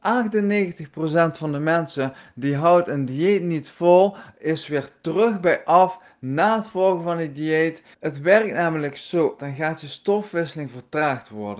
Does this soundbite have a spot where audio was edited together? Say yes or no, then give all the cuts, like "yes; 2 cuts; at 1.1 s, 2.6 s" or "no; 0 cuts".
yes; 2 cuts; at 7.9 s, 9.4 s